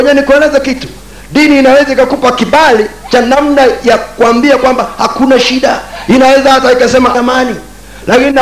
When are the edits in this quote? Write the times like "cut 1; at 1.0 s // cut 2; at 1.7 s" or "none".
cut 1; at 7.1 s